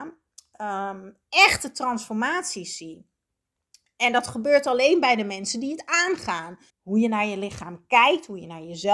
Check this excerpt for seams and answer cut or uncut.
cut